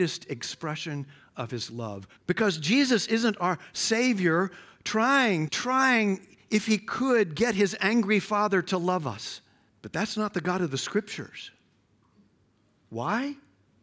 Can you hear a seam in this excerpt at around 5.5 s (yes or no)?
yes